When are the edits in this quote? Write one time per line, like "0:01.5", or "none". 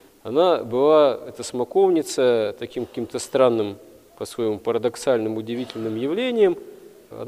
none